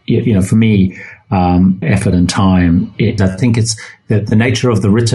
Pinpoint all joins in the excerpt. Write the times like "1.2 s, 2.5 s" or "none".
1.8 s, 3.2 s